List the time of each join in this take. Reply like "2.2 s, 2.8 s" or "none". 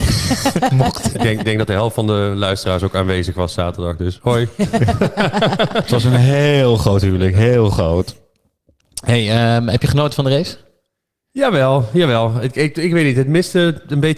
none